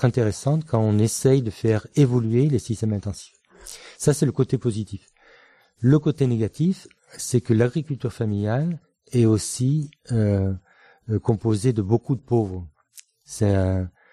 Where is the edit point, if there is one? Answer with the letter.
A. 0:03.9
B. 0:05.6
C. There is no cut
C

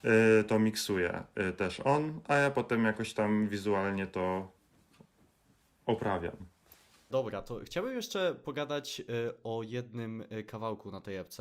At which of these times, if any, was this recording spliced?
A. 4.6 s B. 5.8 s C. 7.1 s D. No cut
C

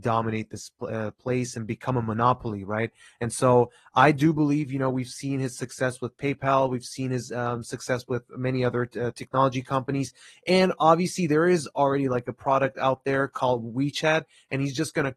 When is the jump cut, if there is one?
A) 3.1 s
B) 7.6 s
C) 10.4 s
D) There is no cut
D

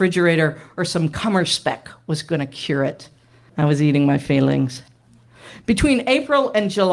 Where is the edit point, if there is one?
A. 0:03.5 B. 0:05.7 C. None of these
A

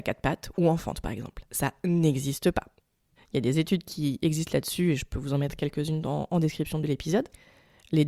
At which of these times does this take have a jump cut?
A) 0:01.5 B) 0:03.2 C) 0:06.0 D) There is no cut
B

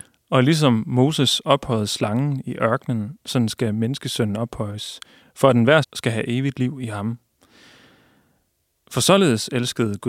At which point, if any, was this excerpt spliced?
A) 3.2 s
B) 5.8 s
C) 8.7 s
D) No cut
B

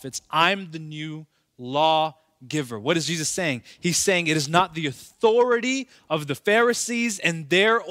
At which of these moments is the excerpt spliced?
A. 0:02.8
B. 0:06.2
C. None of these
C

